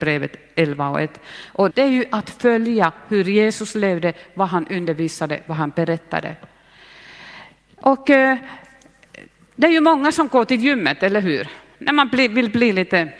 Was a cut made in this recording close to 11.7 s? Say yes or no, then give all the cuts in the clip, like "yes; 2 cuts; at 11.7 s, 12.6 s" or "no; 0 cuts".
no; 1 cut; at 1.7 s